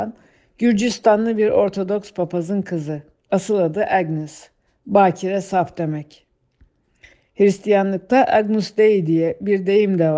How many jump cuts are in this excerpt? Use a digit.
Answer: 0